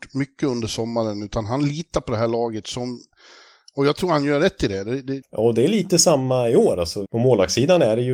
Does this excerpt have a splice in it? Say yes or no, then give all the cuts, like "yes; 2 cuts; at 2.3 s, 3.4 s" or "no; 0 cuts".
yes; 2 cuts; at 5.2 s, 7.1 s